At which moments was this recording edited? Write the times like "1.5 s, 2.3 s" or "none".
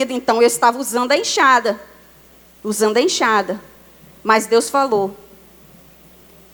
none